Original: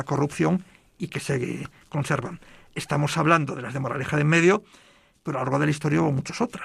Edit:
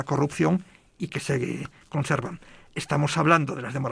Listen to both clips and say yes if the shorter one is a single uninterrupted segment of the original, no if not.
yes